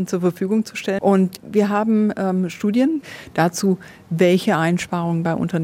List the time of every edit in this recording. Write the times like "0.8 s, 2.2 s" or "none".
1.0 s